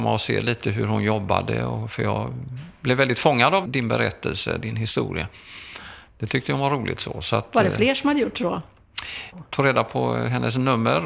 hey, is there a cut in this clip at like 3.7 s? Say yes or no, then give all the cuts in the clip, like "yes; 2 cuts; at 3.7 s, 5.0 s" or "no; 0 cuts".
yes; 2 cuts; at 3.7 s, 9.3 s